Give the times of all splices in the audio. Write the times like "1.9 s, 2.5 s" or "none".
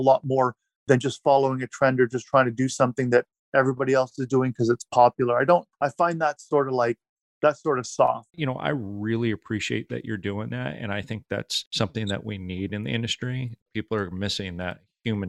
8.3 s

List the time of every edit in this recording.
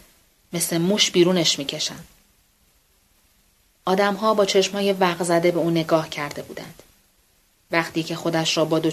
7.5 s

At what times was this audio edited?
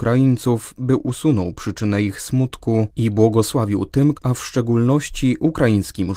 4.1 s

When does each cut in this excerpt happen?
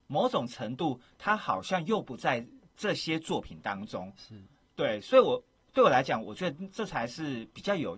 none

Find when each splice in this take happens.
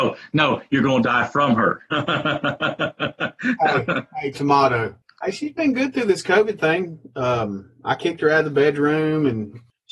4.3 s

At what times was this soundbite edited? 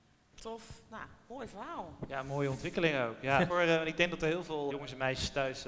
3.5 s, 4.7 s

